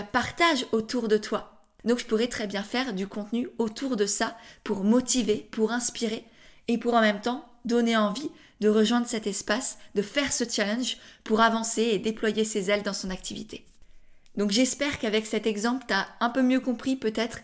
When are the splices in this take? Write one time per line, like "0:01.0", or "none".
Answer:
0:01.8